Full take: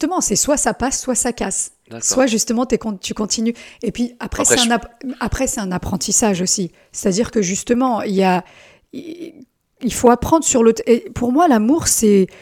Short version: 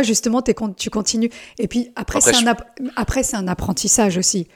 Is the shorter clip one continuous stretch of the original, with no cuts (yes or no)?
yes